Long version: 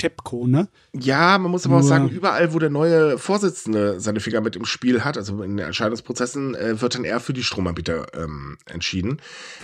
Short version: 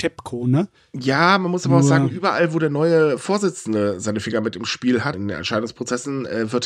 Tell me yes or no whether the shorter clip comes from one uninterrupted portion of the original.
no